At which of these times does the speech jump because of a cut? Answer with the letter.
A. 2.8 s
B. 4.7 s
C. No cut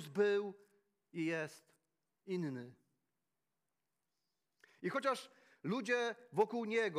C